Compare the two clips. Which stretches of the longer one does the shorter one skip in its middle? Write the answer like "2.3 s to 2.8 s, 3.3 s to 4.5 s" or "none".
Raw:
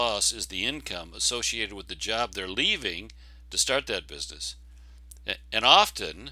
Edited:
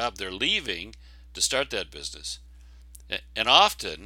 none